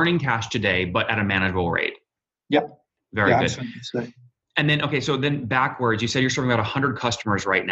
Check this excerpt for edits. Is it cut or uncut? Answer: uncut